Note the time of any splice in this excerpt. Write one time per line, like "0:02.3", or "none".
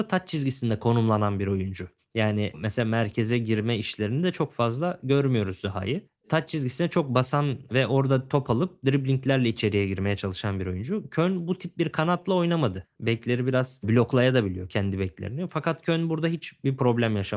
0:13.0